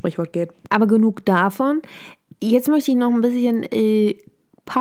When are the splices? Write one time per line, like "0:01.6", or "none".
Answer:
none